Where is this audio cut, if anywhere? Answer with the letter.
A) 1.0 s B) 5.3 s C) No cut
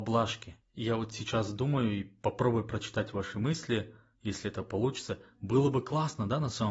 C